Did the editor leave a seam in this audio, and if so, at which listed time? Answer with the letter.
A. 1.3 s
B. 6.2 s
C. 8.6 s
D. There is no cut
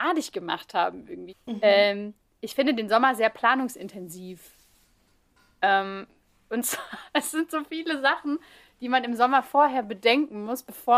A